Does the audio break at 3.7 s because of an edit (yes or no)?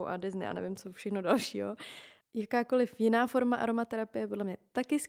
no